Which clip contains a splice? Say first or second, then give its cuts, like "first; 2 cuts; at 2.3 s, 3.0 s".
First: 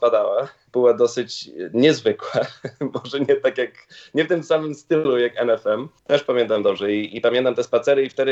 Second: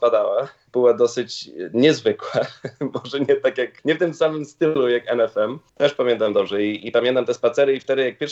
second; 1 cut; at 3.8 s